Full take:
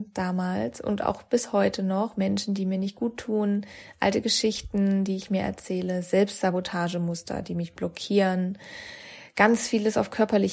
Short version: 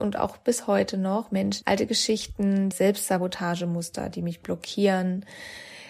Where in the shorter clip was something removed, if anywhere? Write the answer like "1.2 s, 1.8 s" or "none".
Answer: 1.6 s, 2.7 s